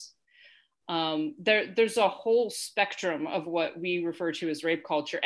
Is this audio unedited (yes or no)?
yes